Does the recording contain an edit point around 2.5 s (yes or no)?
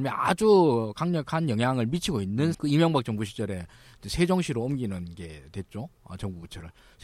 yes